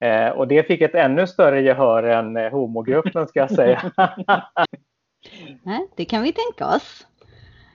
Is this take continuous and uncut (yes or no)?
no